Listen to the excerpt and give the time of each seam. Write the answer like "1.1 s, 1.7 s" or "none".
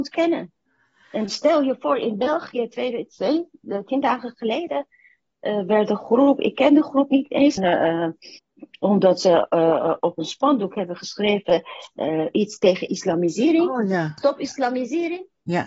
7.6 s